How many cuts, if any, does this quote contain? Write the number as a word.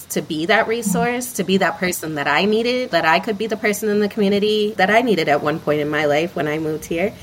two